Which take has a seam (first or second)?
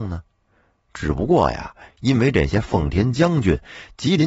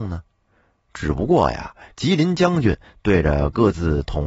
second